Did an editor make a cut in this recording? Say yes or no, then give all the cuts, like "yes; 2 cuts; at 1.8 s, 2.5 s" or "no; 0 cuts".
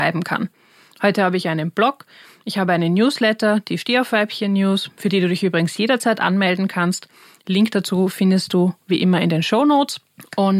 no; 0 cuts